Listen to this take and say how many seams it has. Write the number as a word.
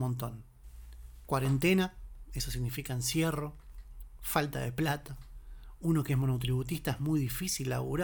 zero